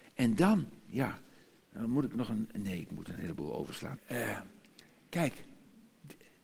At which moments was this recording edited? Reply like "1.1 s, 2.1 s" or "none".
4.0 s